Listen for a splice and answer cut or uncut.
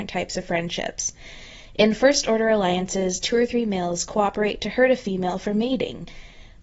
uncut